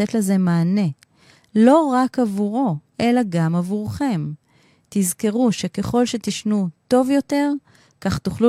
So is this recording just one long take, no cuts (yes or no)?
yes